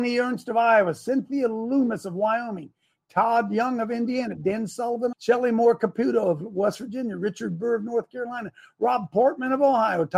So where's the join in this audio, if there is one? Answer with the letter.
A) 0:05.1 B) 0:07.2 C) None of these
A